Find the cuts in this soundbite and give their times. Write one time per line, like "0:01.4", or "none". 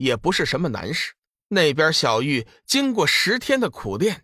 0:01.4